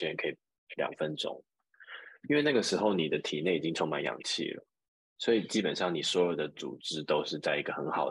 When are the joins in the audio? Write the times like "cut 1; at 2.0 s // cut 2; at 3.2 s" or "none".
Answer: none